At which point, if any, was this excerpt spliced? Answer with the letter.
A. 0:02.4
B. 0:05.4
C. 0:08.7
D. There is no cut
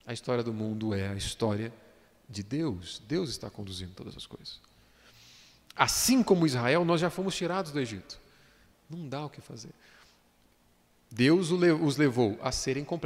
C